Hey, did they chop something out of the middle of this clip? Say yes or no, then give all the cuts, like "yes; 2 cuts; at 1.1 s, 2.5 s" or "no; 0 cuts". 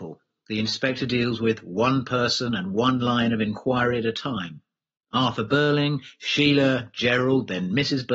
no; 0 cuts